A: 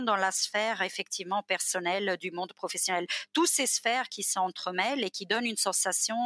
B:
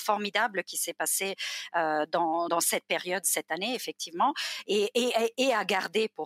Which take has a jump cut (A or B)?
B